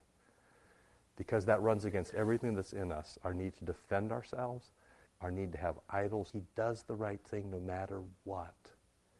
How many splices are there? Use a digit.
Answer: 2